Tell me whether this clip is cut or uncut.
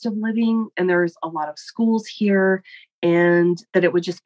uncut